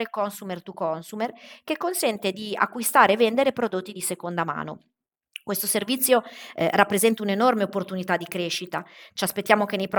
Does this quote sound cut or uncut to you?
uncut